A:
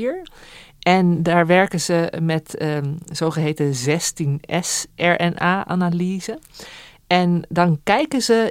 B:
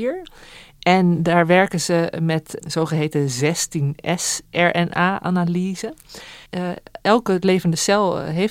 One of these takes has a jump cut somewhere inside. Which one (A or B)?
B